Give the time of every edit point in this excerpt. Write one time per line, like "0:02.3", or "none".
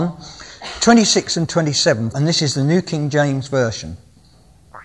0:02.1